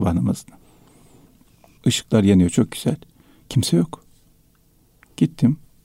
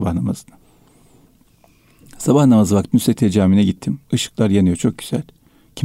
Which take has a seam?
first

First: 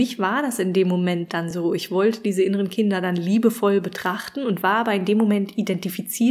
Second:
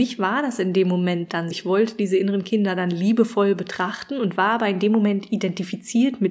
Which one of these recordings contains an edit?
second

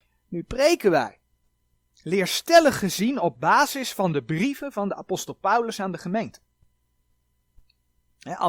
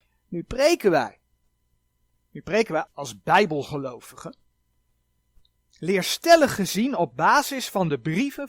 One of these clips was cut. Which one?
first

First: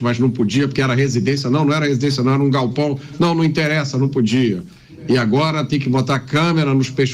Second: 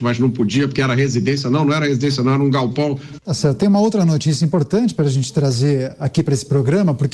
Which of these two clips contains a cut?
second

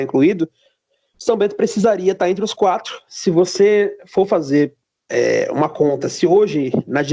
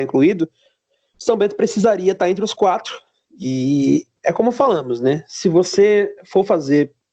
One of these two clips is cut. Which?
first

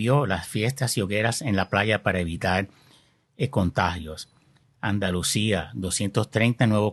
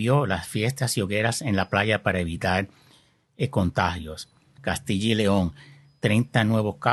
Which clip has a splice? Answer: second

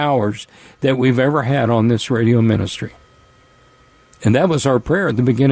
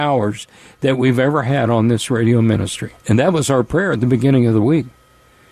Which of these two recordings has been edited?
second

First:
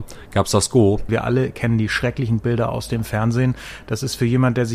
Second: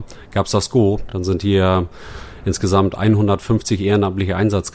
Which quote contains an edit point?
first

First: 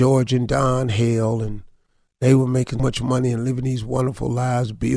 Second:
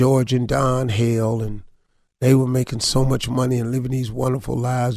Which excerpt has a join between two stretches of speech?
first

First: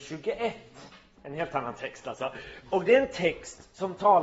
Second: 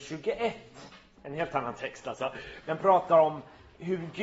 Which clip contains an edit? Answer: second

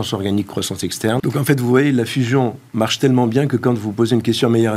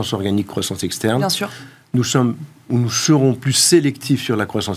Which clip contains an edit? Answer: first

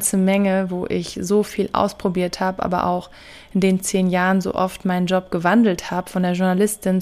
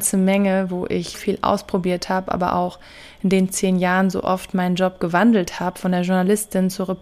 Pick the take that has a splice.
second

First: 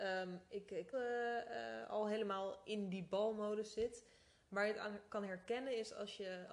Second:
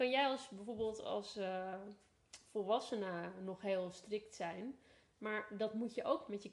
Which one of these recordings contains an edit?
first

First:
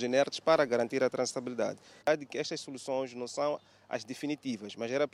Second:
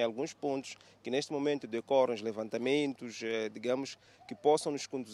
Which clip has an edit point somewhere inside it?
first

